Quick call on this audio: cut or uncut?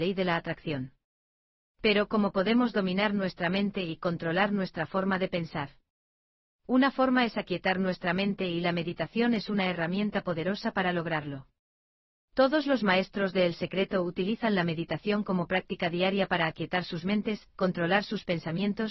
uncut